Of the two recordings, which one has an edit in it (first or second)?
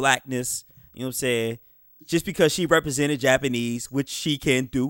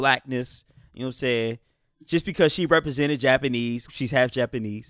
second